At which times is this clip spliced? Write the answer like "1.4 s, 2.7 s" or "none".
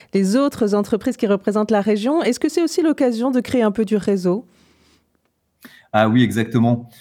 none

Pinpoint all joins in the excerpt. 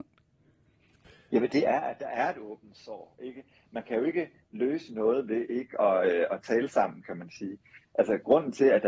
none

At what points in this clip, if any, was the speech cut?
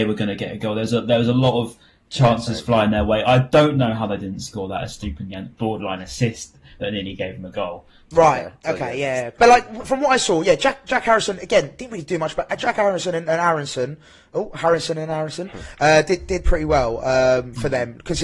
8.1 s

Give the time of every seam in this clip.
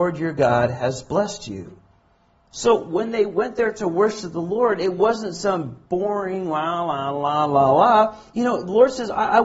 none

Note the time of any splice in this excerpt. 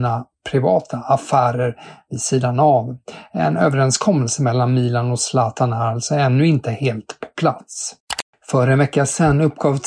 none

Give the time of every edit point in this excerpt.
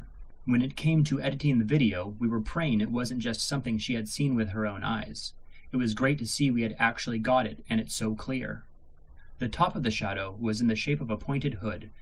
none

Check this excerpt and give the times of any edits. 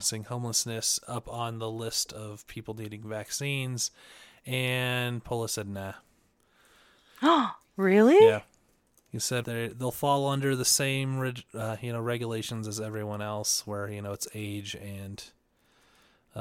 9.4 s

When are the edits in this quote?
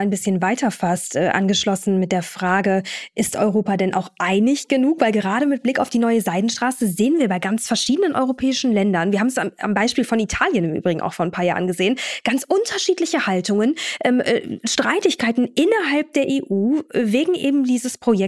none

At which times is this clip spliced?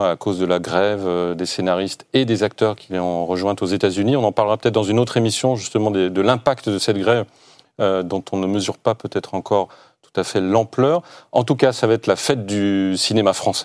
none

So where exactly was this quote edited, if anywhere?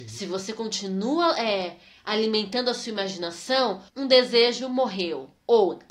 3.9 s

